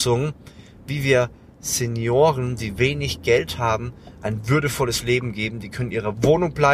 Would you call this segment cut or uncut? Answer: uncut